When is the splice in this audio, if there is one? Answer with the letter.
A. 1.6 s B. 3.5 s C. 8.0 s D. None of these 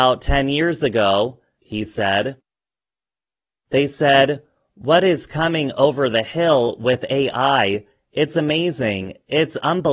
A